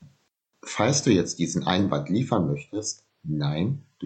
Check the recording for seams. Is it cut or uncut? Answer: uncut